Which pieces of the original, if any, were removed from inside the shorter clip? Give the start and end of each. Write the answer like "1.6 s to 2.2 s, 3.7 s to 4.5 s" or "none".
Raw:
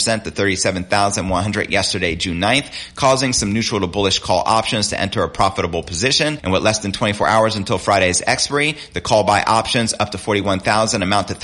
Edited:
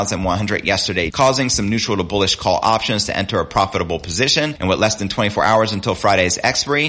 2.2 s to 2.9 s